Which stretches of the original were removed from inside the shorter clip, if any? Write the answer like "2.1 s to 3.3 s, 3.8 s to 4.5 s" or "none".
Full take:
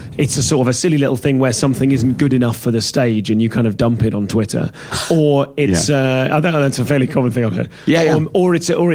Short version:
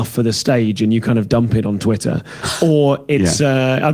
none

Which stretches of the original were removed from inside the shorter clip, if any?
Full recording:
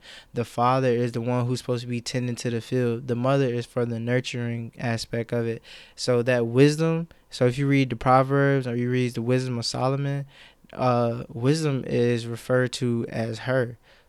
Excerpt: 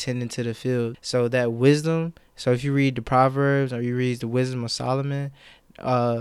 3.0 s to 5.9 s

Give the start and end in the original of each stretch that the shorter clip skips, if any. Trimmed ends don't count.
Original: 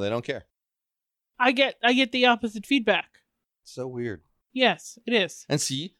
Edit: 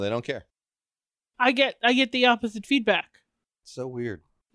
none

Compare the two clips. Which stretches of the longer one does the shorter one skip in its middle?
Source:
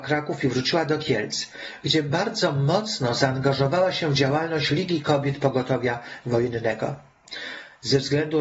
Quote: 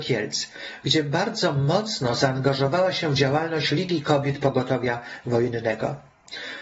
none

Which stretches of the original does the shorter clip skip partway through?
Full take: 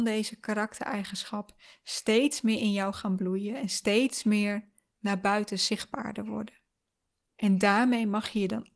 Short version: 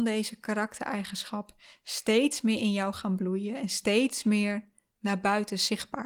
none

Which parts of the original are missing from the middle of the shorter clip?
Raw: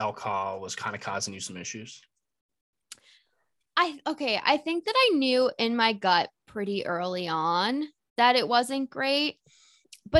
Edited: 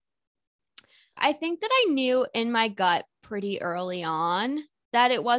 3.3 s to 4.4 s

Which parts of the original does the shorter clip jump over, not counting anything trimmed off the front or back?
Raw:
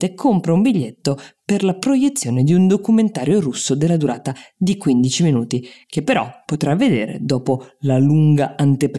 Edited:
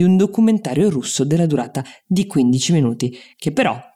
none

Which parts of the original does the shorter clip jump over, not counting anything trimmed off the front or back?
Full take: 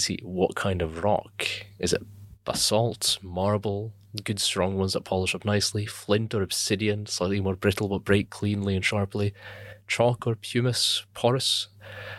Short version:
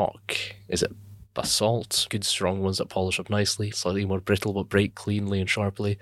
3.2 s to 4.2 s, 5.9 s to 7.1 s

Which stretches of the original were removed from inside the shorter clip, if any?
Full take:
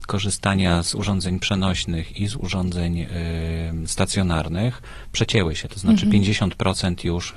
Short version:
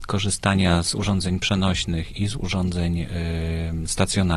none

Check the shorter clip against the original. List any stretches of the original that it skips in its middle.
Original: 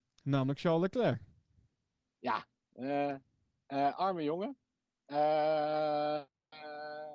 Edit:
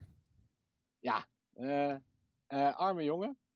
none

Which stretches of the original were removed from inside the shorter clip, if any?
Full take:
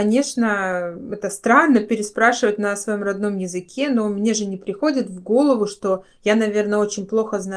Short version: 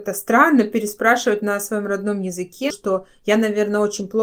3.9 s to 5.7 s

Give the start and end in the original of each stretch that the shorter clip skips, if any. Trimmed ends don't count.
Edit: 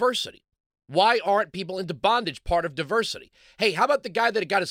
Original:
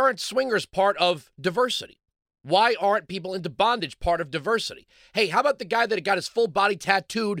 none

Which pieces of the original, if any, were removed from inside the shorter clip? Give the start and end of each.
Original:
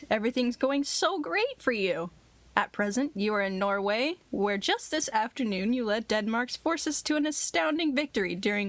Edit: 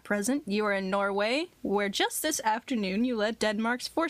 none

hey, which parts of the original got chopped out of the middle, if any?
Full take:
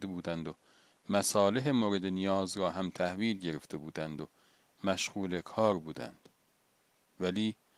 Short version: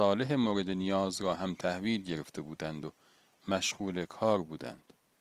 none

